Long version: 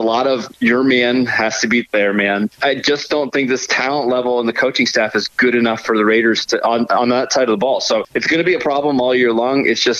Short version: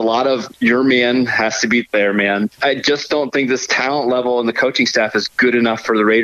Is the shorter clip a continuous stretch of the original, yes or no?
yes